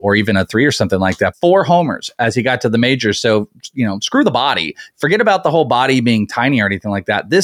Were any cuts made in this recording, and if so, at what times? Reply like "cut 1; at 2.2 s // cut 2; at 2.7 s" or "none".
cut 1; at 1.3 s